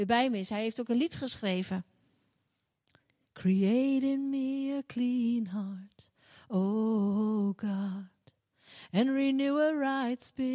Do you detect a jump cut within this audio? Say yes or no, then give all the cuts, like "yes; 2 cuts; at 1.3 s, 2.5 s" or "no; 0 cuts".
no; 0 cuts